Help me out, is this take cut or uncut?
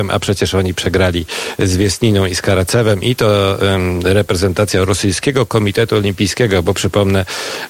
uncut